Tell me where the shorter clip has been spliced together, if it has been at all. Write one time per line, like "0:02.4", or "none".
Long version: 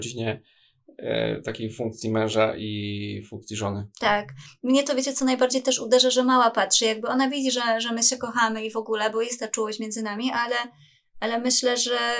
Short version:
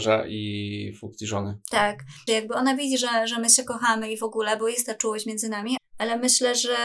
0:02.3
0:05.8